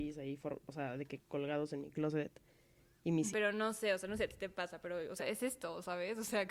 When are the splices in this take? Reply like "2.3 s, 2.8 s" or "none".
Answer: 3.3 s, 5.2 s